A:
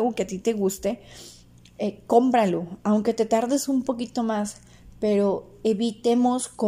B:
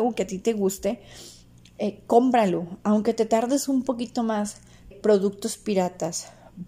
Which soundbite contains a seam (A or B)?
B